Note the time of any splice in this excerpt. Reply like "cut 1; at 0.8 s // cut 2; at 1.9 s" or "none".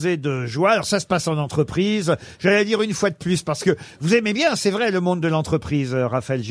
none